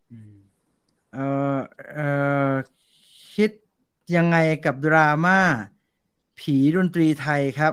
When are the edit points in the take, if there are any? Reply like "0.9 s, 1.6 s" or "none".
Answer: none